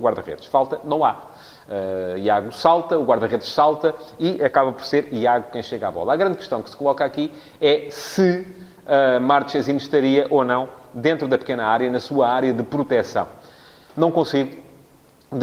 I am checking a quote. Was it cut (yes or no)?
yes